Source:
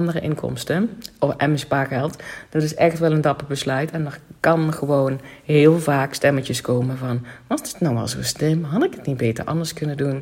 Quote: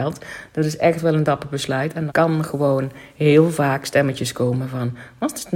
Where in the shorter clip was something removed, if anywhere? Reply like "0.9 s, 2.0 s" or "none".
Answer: 2.1 s